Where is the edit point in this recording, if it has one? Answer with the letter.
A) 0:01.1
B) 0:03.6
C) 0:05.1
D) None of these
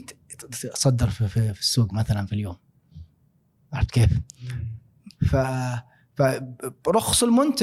C